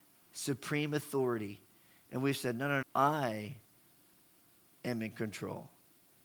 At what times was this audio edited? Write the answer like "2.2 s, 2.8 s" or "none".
2.8 s